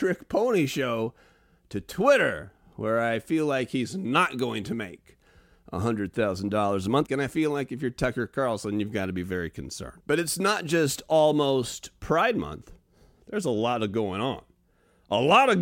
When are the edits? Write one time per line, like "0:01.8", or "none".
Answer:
0:07.1
0:10.0